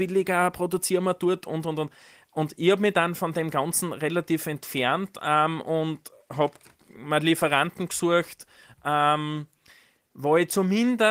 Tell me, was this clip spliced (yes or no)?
no